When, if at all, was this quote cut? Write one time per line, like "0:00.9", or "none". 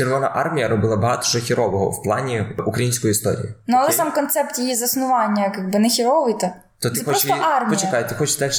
none